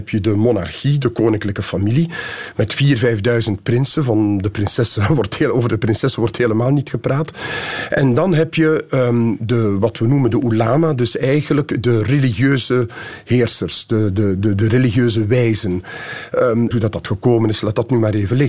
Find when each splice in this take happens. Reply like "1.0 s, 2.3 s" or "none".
16.7 s